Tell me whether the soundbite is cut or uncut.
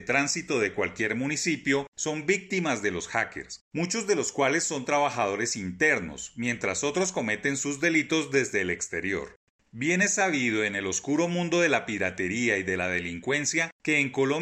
uncut